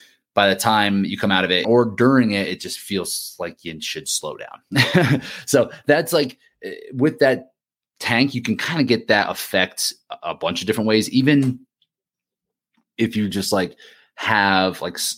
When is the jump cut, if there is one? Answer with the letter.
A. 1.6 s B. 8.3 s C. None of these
A